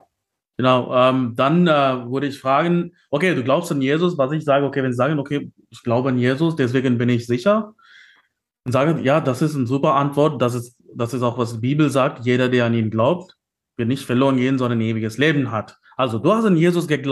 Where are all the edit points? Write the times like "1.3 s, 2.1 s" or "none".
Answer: none